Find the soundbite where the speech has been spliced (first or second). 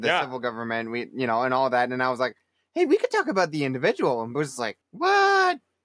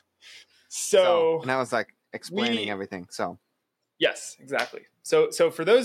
first